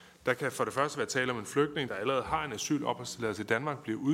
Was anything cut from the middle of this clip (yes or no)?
yes